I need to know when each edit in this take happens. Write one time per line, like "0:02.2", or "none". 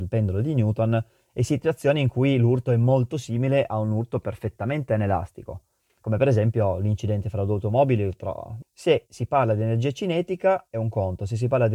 0:08.6